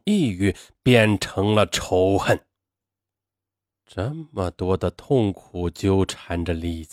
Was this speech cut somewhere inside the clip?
no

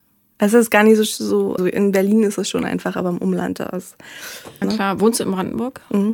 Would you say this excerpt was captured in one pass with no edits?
no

